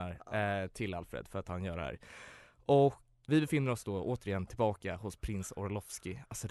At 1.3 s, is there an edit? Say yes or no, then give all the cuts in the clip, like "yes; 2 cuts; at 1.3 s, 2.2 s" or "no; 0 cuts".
no; 1 cut; at 3.2 s